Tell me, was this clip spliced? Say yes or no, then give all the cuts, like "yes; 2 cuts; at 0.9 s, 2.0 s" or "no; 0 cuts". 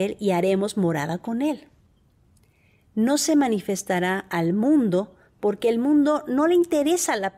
no; 0 cuts